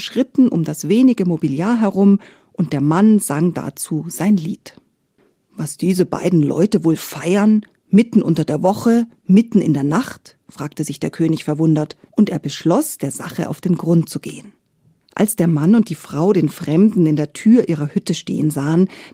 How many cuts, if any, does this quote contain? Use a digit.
2